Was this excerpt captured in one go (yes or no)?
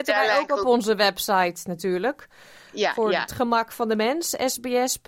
yes